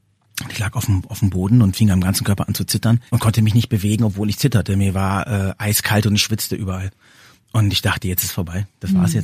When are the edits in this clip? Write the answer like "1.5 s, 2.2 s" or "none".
3.1 s